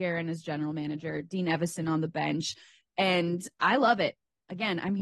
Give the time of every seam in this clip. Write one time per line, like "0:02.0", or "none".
none